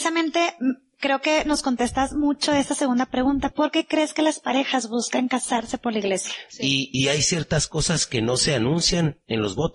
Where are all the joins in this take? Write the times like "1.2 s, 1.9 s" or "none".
3.5 s, 6.5 s